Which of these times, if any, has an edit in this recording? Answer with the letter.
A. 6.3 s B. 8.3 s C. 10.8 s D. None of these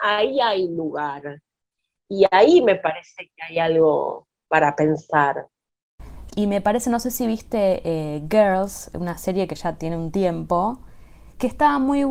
A